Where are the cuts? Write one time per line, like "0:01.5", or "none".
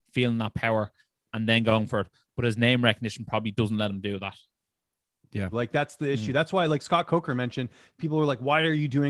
0:05.5